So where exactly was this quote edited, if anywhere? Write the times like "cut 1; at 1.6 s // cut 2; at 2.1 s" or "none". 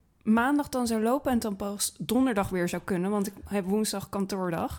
none